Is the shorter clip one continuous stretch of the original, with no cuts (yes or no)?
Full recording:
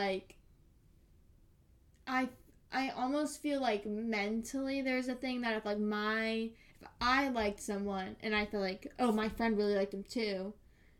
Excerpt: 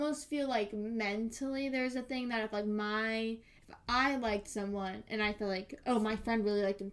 yes